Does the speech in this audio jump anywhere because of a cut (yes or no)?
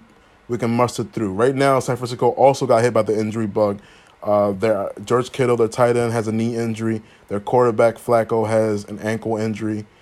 no